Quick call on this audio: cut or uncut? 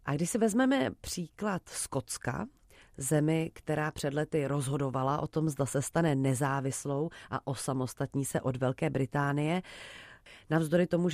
uncut